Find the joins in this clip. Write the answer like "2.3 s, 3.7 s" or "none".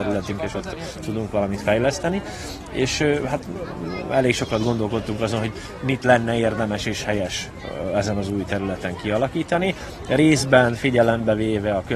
none